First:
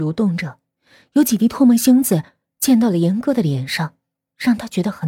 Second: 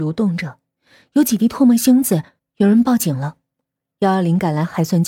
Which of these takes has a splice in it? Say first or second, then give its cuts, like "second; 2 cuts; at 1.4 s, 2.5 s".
second; 1 cut; at 2.4 s